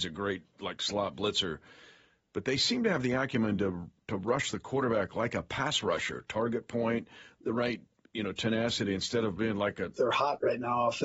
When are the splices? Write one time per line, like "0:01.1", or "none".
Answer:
0:09.9